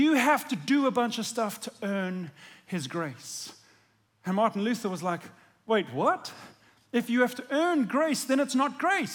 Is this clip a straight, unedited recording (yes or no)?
yes